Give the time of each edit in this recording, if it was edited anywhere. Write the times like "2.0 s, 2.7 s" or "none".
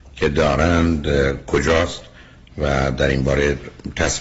none